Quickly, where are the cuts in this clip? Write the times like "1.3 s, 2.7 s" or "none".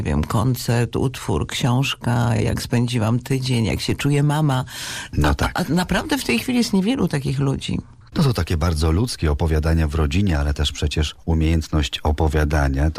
none